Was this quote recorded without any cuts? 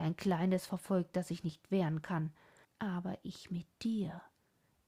no; 1 cut; at 2.6 s

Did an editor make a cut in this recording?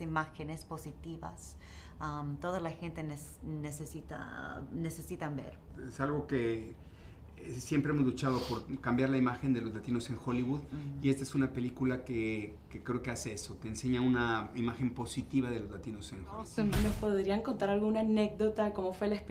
no; 0 cuts

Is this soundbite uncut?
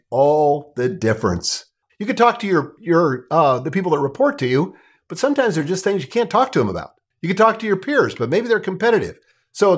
no; 1 cut; at 1.9 s

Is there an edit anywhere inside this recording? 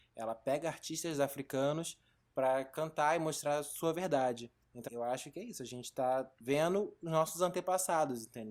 yes; 1 cut; at 4.9 s

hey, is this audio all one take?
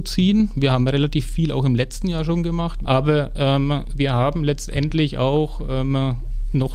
no; 1 cut; at 2.8 s

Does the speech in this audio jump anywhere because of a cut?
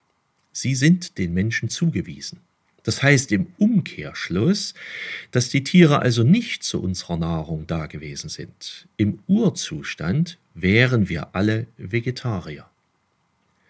no; 0 cuts

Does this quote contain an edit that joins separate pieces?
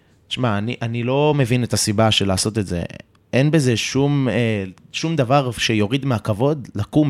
no; 0 cuts

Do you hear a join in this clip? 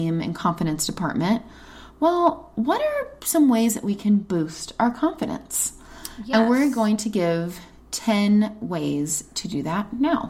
no; 0 cuts

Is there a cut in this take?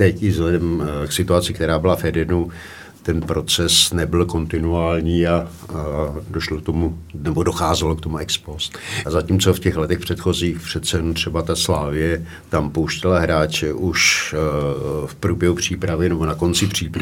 yes; 3 cuts; at 1.5 s, 6.3 s, 9.0 s

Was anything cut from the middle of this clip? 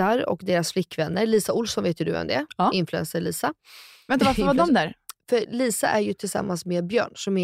no; 0 cuts

